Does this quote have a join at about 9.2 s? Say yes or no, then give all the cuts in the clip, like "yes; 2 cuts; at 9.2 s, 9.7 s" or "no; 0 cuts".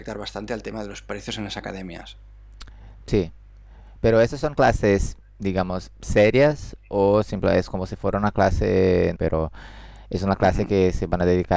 yes; 1 cut; at 9.2 s